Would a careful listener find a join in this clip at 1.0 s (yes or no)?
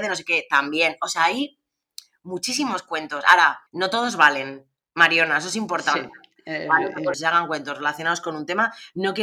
no